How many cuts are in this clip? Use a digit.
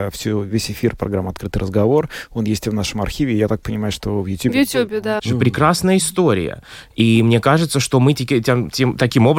1